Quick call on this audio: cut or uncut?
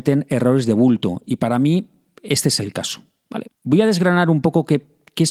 cut